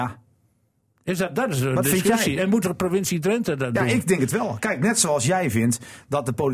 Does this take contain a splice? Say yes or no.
no